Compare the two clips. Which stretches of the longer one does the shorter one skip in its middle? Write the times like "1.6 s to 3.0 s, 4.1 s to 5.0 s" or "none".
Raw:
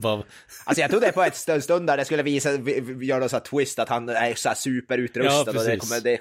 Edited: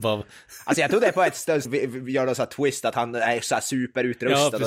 1.7 s to 2.6 s